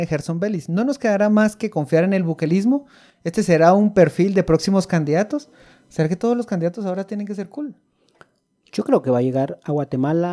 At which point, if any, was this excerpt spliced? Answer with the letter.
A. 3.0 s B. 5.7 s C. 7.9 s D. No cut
D